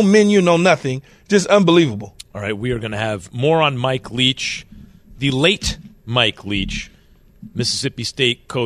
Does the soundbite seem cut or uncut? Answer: uncut